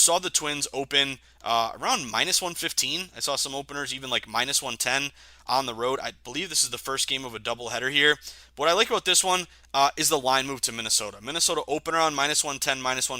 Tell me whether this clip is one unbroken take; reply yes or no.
yes